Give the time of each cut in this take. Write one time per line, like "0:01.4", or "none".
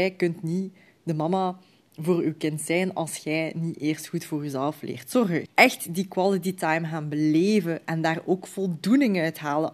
0:05.5